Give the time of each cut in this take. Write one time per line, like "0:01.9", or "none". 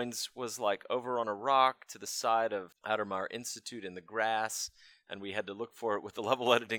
0:02.7